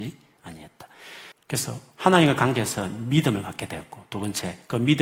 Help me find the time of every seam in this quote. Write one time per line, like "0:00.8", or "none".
0:01.3

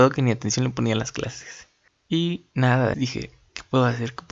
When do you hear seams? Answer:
0:01.9
0:02.9

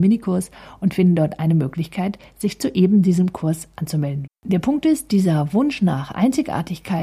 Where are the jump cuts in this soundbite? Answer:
0:04.3

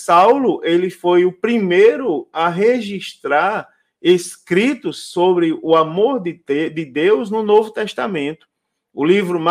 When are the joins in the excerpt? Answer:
none

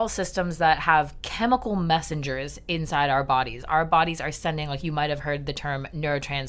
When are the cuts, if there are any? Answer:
none

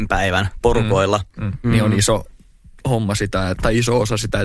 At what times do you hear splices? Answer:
0:01.6
0:03.5

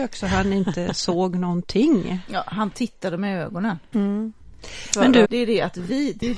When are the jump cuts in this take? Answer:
0:03.9
0:05.2

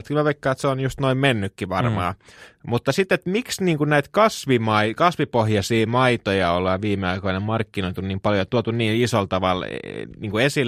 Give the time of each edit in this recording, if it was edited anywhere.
none

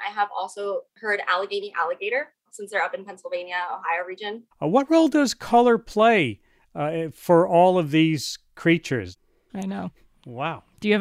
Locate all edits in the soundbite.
0:04.5
0:09.5

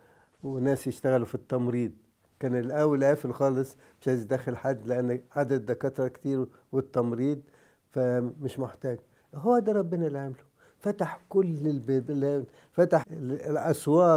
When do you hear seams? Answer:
0:13.0

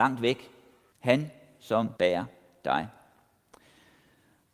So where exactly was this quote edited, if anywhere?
0:00.9
0:02.0

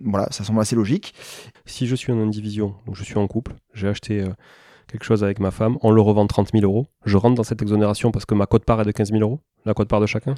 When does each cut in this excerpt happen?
0:01.5

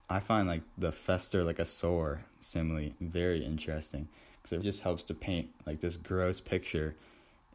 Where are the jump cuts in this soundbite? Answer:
0:04.6

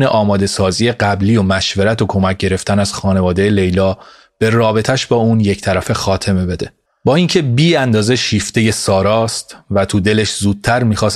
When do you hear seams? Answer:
0:06.9

